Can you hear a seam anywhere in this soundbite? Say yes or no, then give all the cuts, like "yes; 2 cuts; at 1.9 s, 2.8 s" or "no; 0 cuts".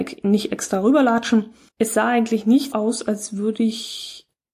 yes; 2 cuts; at 1.7 s, 2.7 s